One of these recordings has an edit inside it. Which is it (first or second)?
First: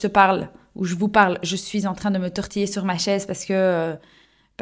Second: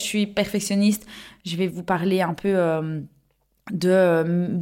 second